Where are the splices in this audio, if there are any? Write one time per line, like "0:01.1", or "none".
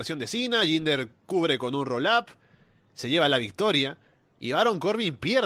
none